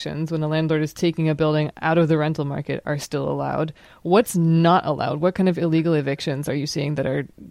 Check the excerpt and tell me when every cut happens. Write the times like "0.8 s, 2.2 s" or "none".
none